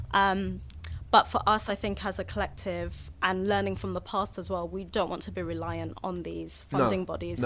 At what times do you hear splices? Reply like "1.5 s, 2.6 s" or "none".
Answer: none